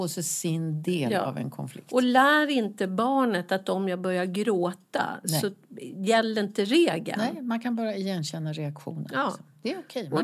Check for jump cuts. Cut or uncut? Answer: uncut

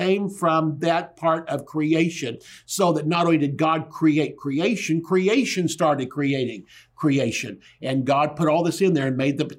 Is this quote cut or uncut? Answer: uncut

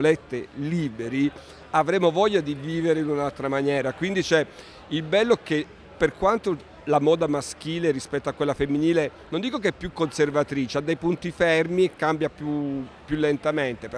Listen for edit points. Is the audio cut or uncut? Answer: uncut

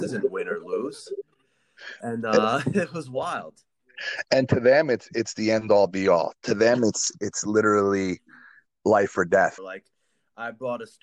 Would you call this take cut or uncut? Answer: cut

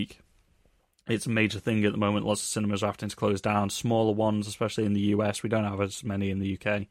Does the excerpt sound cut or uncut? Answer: uncut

